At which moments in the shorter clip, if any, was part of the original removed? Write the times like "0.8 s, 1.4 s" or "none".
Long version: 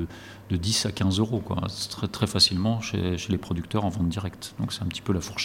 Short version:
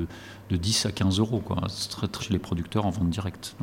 2.2 s